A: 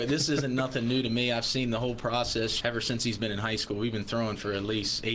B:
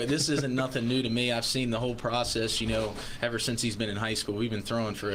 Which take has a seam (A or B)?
A